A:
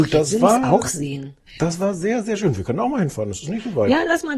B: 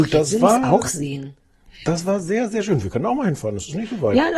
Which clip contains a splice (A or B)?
A